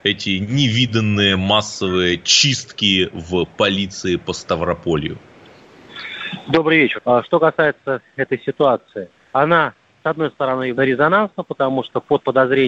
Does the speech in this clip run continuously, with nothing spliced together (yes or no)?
no